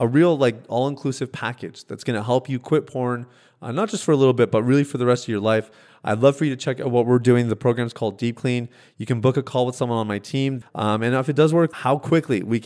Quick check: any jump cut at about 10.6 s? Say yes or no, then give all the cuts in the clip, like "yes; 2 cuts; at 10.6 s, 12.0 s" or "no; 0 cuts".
yes; 2 cuts; at 10.6 s, 11.7 s